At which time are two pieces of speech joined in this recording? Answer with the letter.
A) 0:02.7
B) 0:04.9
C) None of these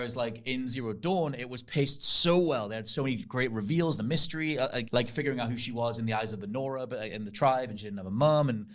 B